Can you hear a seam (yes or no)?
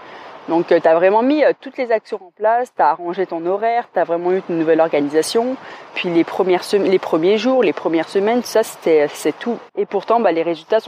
yes